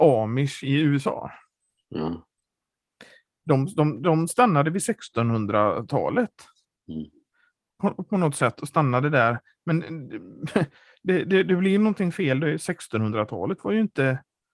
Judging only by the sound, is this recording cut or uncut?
uncut